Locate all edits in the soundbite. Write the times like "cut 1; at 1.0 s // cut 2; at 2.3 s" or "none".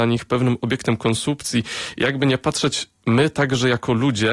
none